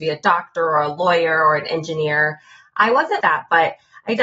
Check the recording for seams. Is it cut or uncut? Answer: cut